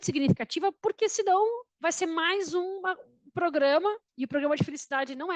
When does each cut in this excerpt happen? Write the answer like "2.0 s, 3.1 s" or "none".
4.1 s